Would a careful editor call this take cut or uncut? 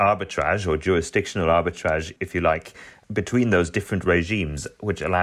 uncut